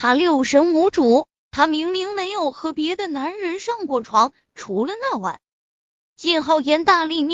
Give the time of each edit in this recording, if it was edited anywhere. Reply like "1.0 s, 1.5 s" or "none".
none